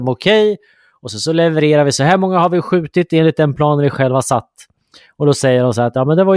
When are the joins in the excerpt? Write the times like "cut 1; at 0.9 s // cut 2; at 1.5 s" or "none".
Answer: none